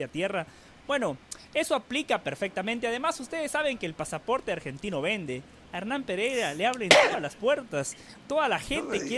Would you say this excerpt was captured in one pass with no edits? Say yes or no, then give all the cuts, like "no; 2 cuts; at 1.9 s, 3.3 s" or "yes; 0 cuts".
yes; 0 cuts